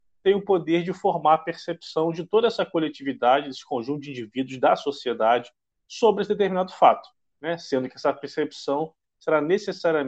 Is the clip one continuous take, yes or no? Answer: yes